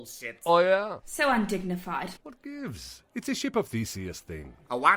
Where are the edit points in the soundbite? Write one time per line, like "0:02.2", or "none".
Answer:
0:01.0
0:02.2